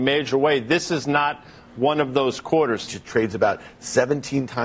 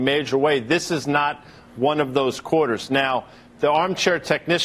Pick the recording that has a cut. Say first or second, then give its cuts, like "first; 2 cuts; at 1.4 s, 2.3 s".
first; 1 cut; at 2.9 s